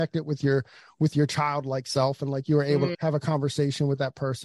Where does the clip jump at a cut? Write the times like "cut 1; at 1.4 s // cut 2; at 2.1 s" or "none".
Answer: cut 1; at 2.9 s